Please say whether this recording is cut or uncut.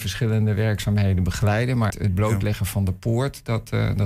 cut